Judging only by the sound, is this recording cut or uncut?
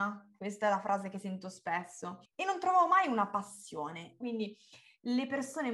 cut